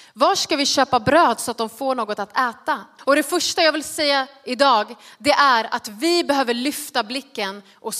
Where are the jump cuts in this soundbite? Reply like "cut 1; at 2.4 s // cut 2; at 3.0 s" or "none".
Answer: cut 1; at 3.0 s